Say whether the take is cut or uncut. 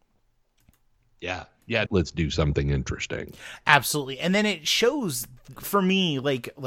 cut